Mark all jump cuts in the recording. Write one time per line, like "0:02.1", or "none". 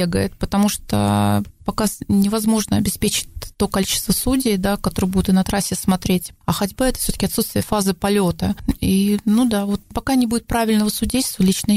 none